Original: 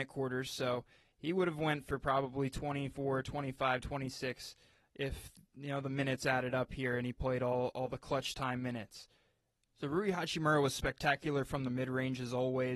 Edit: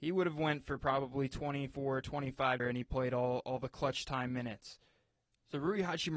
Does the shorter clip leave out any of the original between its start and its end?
yes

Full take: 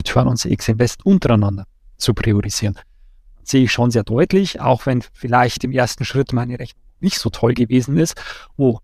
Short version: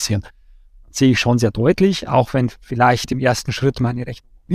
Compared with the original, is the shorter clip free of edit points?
yes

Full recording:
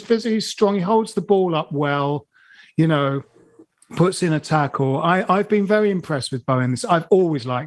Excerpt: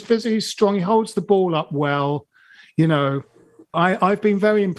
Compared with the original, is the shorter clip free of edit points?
no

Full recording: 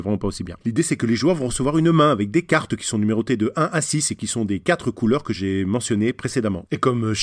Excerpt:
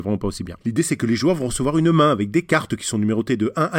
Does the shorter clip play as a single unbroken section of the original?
yes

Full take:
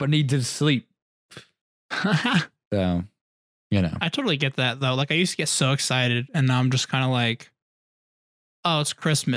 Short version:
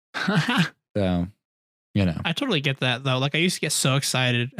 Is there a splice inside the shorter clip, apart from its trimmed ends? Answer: no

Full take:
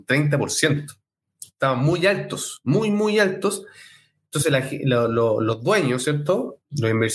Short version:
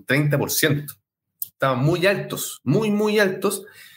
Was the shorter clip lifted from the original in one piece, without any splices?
yes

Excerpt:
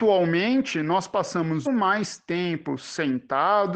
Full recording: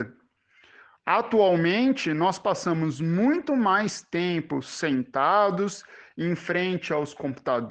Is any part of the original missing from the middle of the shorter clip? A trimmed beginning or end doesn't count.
yes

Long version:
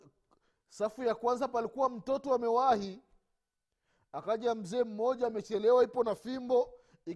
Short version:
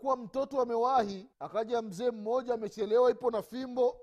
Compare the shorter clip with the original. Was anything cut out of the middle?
yes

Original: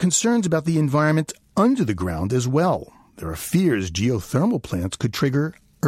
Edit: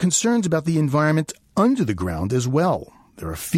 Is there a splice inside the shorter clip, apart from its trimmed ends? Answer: no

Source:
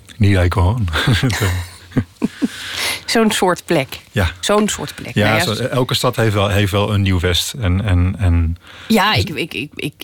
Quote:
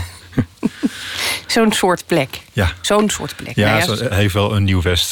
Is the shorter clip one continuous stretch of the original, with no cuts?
no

